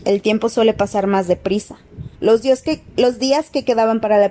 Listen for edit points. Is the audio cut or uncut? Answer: cut